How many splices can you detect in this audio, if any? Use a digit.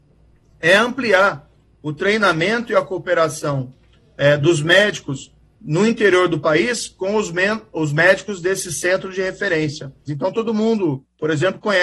1